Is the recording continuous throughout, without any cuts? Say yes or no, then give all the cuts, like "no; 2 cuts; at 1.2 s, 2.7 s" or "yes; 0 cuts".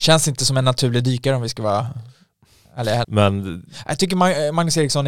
no; 1 cut; at 3.0 s